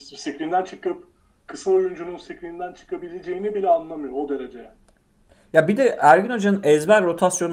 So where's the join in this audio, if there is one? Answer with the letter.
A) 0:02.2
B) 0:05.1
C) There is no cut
C